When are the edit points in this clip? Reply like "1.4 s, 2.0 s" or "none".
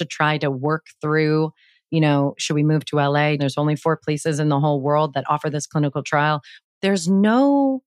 3.4 s, 6.6 s

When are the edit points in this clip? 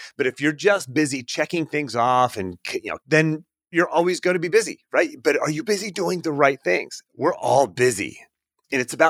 3.0 s, 7.1 s

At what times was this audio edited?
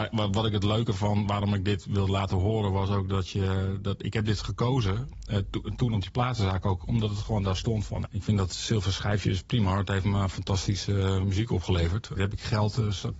8.1 s, 12.2 s

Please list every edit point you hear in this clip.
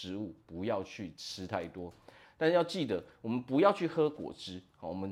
2.2 s

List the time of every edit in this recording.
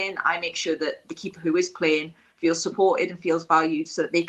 none

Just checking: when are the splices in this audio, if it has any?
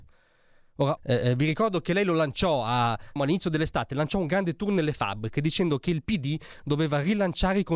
1.0 s, 3.2 s

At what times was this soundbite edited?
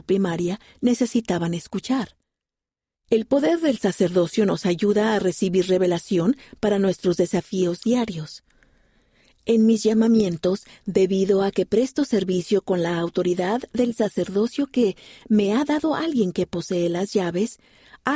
2.9 s

